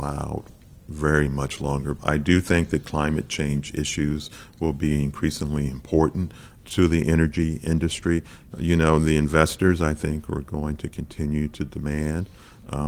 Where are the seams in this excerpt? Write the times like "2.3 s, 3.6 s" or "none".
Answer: 2.0 s, 8.5 s